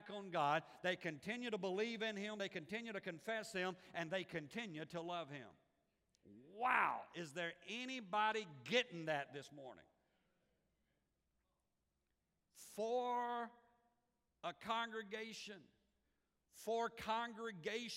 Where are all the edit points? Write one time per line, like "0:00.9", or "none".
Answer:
none